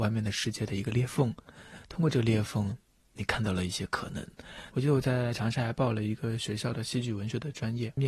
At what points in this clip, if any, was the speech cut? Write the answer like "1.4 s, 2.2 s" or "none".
3.1 s, 4.7 s